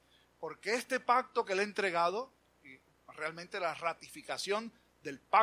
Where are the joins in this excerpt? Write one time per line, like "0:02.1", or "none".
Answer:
none